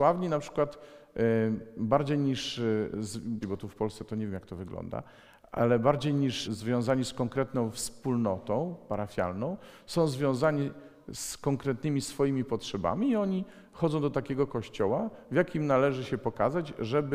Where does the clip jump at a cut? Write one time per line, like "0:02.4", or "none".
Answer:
0:03.4
0:06.4